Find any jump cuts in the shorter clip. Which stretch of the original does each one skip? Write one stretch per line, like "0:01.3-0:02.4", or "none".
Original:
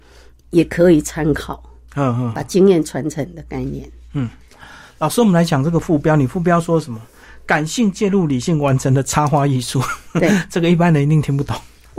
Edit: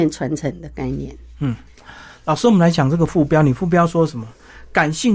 none